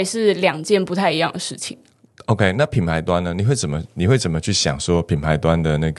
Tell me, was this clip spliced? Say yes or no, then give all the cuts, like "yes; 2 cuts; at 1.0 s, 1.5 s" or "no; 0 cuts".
no; 0 cuts